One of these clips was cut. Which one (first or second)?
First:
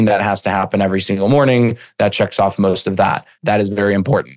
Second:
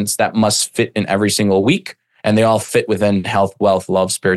first